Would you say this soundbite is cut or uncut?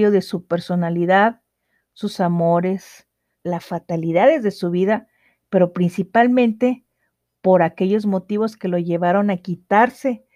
cut